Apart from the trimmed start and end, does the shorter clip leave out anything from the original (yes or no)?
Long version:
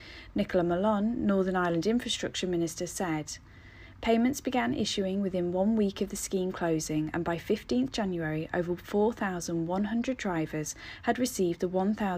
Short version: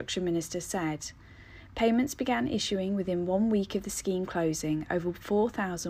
yes